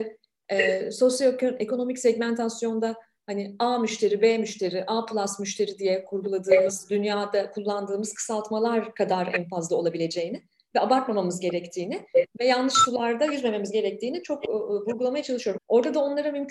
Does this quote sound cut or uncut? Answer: cut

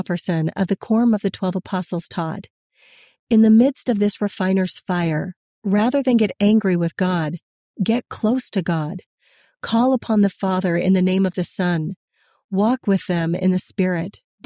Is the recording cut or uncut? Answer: uncut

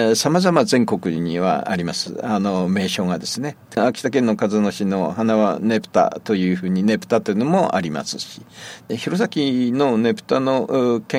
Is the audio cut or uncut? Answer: cut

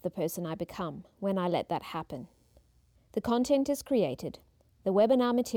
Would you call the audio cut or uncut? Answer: cut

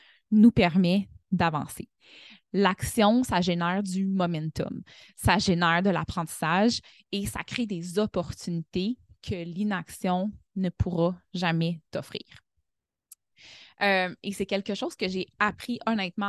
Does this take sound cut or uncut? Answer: uncut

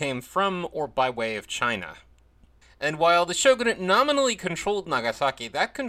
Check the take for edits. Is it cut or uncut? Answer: cut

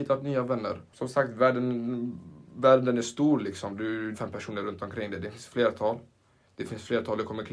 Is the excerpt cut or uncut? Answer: cut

